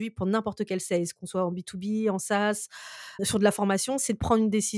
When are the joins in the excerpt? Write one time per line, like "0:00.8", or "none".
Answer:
0:03.2